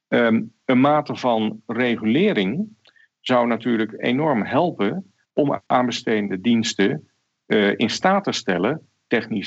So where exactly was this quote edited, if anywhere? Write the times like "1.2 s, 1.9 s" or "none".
5.2 s